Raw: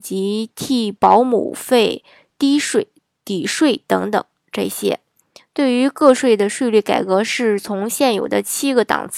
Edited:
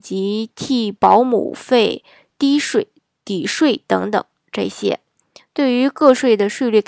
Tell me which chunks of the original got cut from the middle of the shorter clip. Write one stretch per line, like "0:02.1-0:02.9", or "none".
none

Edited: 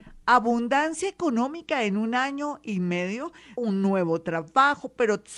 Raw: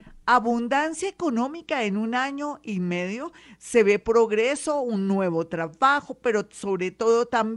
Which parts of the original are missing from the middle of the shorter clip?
0:03.6-0:04.8

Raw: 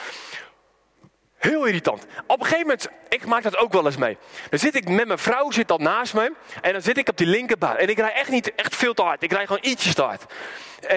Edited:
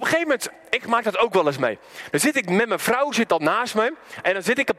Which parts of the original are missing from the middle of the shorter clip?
none

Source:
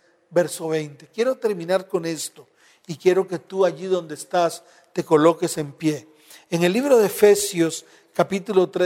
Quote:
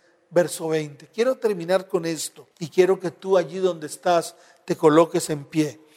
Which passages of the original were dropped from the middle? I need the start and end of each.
0:02.5-0:02.8

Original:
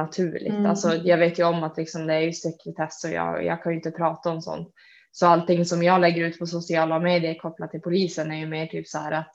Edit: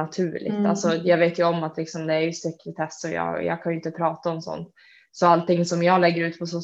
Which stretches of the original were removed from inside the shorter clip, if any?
none

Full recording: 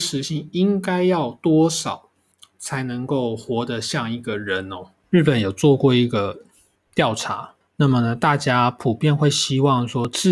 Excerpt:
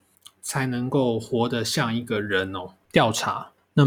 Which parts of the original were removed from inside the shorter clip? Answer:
0:05.0-0:06.9

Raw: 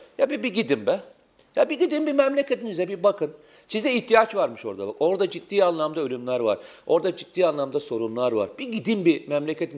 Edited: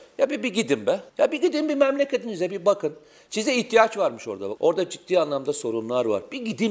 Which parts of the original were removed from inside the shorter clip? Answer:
0:01.1-0:01.5
0:04.9-0:06.8

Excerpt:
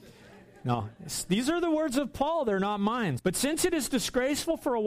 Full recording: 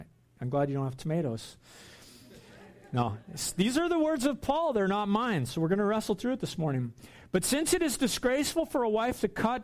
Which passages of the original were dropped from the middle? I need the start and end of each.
0:05.5-0:07.3

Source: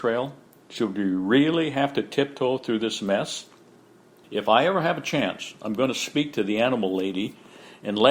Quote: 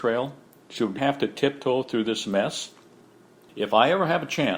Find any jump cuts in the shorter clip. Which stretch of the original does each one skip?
0:01.0-0:01.7

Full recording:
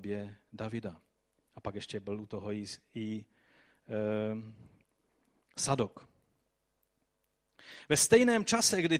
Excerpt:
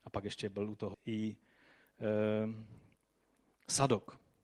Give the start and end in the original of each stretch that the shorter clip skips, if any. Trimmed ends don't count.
0:02.4-0:02.8

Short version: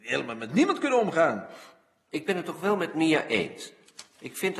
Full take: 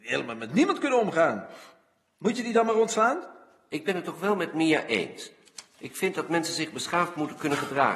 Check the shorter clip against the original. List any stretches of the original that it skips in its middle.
0:02.1-0:03.7

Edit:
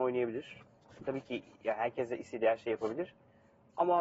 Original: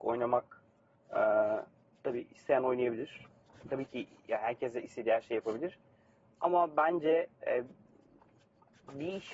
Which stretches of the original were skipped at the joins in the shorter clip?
none

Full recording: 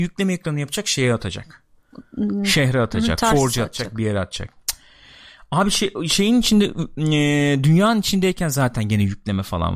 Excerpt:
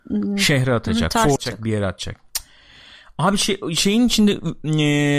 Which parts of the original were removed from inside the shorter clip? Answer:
0:03.4-0:03.7

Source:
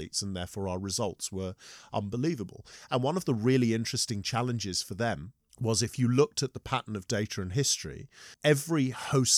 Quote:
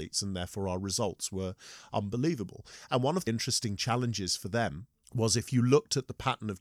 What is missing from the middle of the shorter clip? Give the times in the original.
0:03.3-0:03.7

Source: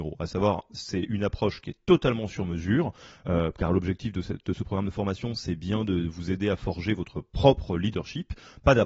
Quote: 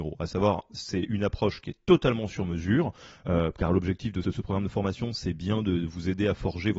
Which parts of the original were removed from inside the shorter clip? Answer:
0:04.2-0:04.5

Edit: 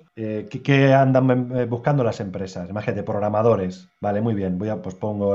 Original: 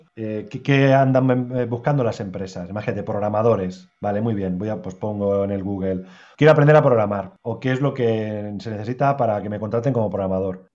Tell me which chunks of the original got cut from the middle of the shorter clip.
none

